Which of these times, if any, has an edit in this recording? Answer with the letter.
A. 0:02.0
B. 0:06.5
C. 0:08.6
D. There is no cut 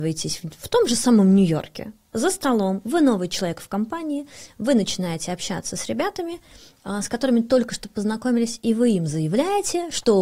D